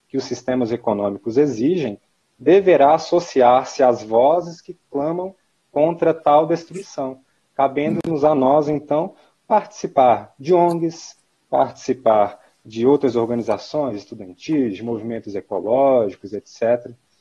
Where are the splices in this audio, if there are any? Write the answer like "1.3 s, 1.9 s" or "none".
none